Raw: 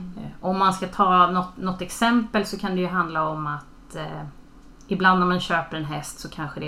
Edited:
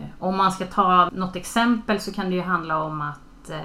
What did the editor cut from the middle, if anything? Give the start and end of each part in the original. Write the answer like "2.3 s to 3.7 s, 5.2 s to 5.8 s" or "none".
1.3 s to 1.5 s